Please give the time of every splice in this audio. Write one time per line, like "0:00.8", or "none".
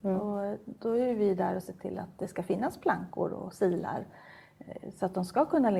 none